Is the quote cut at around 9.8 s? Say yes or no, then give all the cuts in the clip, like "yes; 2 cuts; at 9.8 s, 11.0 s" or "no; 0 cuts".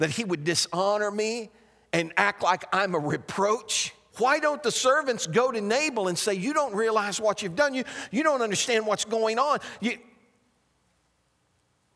no; 1 cut; at 4.1 s